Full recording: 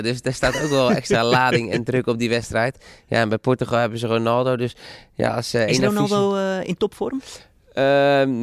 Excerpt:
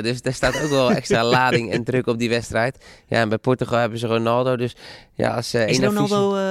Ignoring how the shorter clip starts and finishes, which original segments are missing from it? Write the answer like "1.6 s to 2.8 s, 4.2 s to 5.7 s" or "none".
none